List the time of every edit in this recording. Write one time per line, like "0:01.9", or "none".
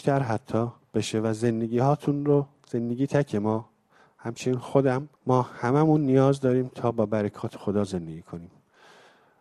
0:03.1
0:05.2